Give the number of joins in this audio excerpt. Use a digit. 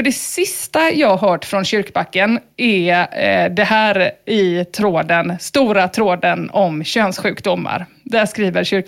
0